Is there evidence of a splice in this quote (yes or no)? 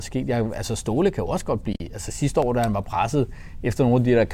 no